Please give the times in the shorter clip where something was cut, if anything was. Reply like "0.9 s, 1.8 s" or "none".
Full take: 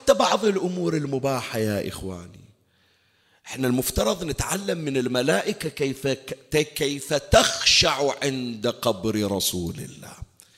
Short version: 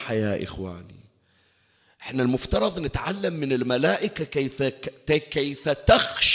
none